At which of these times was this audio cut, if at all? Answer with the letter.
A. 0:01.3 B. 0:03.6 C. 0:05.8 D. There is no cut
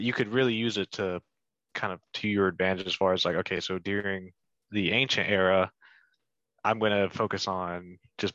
D